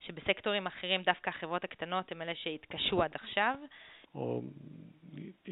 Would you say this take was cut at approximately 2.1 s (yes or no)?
no